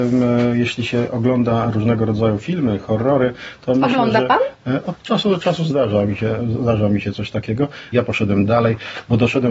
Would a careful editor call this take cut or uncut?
cut